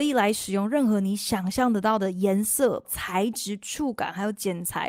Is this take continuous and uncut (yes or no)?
no